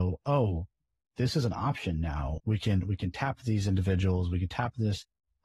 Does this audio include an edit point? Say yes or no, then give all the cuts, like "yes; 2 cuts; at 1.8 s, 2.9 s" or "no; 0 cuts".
yes; 1 cut; at 2.4 s